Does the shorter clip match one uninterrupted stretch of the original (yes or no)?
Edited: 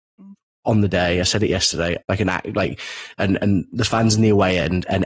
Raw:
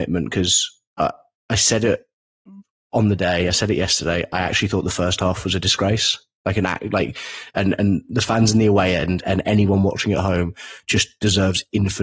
no